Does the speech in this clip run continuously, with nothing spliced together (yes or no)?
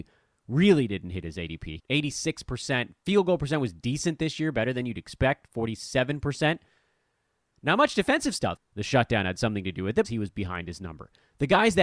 no